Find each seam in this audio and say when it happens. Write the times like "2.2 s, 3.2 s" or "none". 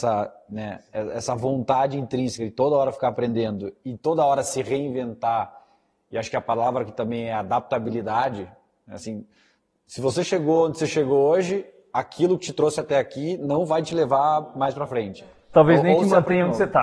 none